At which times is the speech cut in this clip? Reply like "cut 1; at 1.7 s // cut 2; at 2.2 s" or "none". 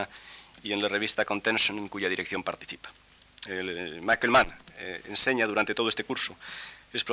none